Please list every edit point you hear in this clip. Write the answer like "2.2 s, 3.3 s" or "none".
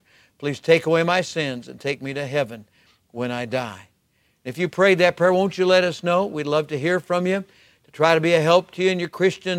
none